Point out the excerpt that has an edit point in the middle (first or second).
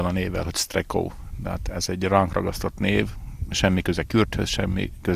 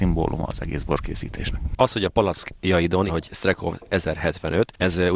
second